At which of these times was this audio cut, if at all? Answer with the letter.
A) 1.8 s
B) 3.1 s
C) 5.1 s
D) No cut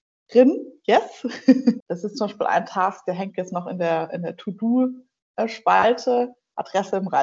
A